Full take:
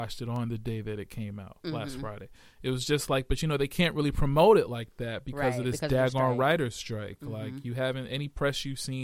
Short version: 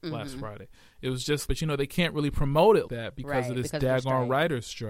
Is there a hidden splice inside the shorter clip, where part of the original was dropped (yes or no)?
yes